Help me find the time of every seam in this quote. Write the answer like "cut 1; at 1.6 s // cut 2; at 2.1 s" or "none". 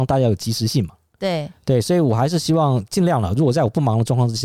none